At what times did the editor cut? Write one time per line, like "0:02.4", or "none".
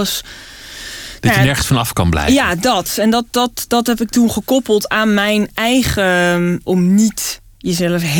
0:06.6